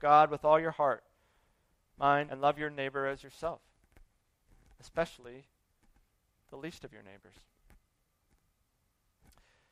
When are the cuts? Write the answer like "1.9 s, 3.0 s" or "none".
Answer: 2.3 s